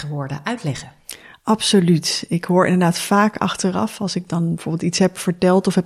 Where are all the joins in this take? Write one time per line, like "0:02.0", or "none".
none